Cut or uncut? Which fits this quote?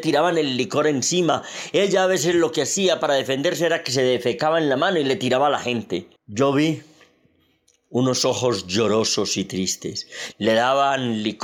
cut